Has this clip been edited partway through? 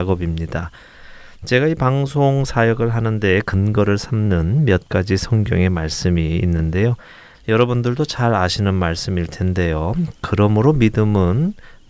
yes; 1 cut; at 7.3 s

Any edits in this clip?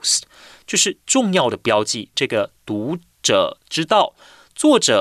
yes; 1 cut; at 2.1 s

